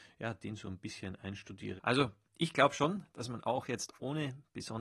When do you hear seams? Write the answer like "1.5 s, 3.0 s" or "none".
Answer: 1.8 s